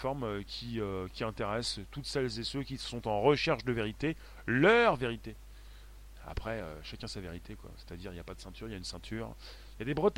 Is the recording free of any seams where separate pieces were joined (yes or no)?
yes